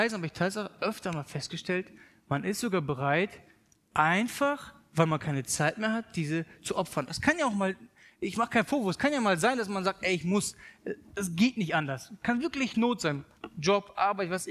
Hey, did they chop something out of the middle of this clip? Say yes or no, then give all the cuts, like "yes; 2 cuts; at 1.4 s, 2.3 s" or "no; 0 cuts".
no; 0 cuts